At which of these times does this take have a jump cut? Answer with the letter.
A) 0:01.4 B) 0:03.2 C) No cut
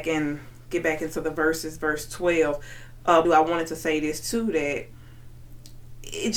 B